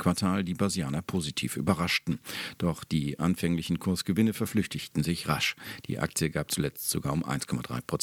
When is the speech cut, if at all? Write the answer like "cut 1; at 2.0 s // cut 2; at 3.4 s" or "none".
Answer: none